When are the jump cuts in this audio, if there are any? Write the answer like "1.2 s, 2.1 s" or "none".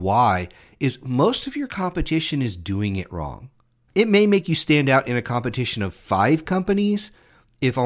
3.9 s